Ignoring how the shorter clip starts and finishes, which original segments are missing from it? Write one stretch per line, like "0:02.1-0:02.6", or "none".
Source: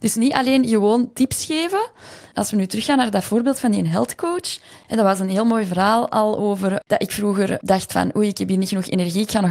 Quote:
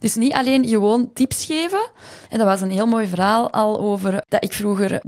0:02.3-0:04.8

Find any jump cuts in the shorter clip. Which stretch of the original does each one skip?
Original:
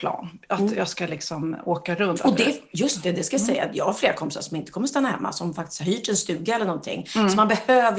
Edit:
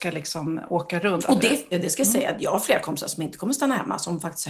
0:02.7-0:03.0

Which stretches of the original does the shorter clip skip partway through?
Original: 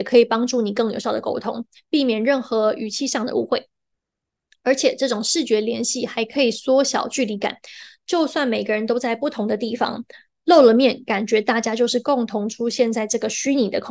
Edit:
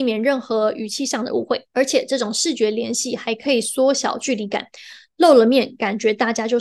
0:03.7-0:04.6
0:08.0-0:10.4

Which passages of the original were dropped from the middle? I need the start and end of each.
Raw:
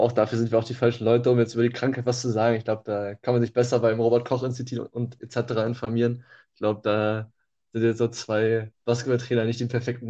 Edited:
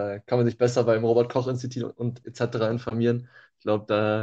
none

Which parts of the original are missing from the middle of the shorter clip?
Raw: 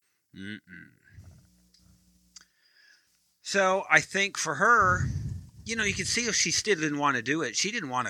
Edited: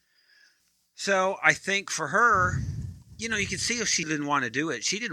0:06.5-0:06.8

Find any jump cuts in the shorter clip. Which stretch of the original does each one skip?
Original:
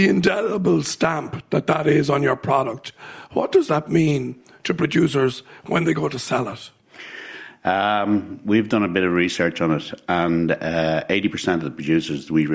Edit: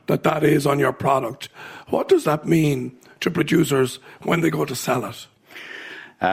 none

